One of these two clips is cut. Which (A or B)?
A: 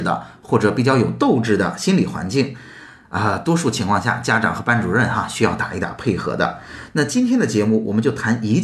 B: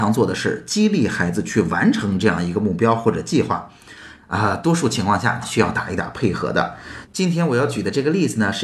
B